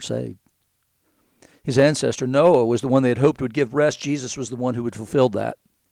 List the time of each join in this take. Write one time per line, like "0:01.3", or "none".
none

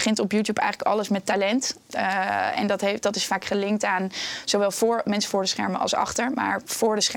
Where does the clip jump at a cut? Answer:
none

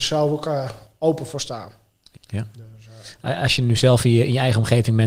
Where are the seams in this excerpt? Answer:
0:02.1

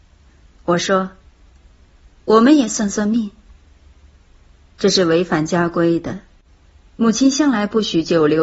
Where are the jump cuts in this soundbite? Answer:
none

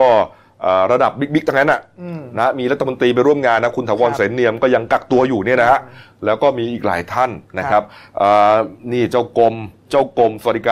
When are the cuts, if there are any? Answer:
none

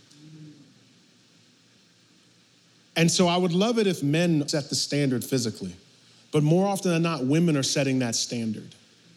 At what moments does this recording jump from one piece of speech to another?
0:04.5

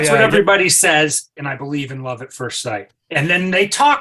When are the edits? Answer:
0:01.4

